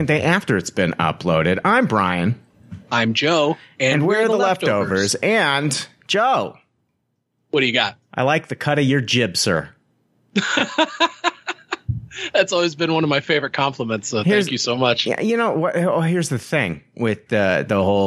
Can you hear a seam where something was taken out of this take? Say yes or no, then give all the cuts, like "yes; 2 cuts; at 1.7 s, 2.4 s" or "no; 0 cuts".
no; 0 cuts